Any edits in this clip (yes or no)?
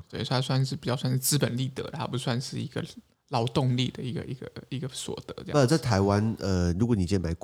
no